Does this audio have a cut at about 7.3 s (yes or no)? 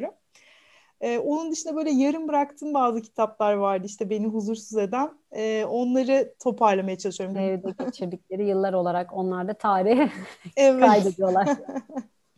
yes